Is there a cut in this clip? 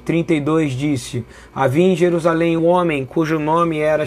yes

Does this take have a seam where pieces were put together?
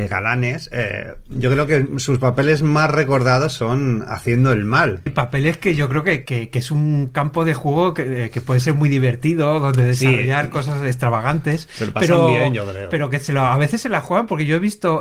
yes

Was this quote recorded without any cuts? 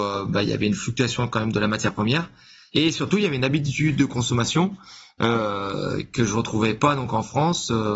no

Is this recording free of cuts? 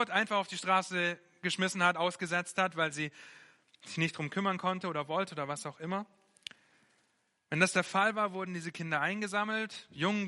yes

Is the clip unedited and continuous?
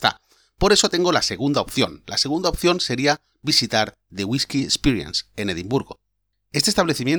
yes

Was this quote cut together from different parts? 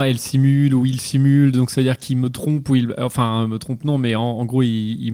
no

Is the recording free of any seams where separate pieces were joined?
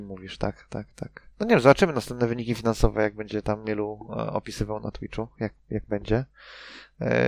no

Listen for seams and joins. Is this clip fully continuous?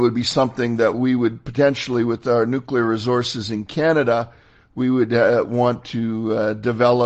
yes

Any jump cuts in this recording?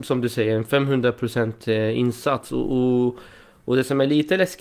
no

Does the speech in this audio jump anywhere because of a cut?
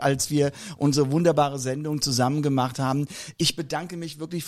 no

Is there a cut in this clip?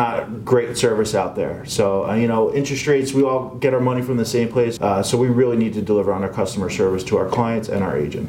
yes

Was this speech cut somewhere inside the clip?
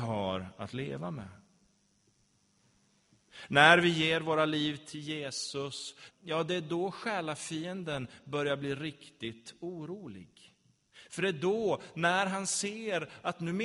yes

